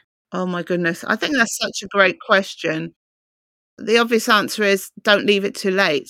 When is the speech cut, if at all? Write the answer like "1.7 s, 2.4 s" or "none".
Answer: none